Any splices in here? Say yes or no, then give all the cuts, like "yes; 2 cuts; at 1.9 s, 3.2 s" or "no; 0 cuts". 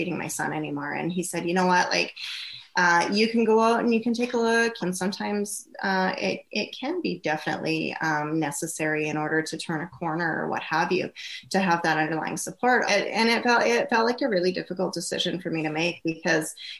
yes; 2 cuts; at 4.8 s, 12.9 s